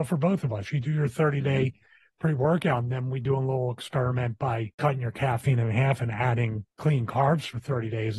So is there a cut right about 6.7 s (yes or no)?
yes